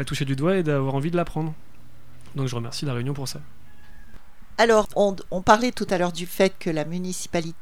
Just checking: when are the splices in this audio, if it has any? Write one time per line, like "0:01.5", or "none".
0:04.9